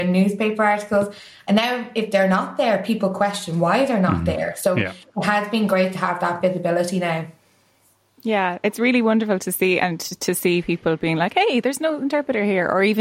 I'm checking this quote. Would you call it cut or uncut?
uncut